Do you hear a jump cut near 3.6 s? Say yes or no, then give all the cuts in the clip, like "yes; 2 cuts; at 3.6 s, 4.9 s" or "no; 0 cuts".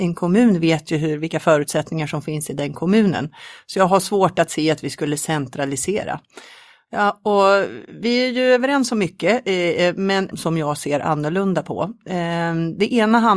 no; 1 cut; at 10.3 s